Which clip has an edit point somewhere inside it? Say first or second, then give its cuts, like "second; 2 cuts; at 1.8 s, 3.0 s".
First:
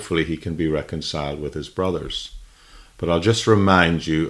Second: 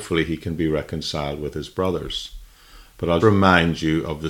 second; 1 cut; at 3.2 s